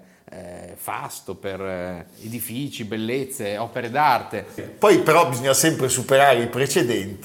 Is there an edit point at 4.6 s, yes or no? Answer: yes